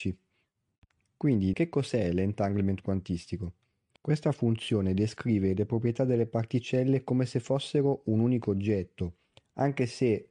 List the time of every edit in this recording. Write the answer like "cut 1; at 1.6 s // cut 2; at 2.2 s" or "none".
cut 1; at 1.5 s // cut 2; at 4.0 s